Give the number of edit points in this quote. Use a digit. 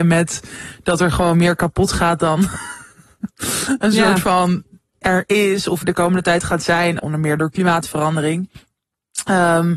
2